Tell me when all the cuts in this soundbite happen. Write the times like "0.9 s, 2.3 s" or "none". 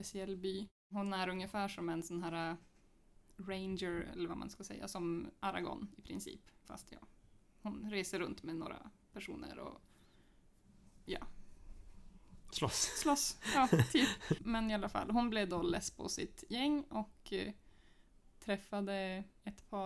6.6 s, 14.4 s